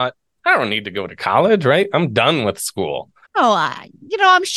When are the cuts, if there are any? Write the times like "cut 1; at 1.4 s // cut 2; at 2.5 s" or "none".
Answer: cut 1; at 3.2 s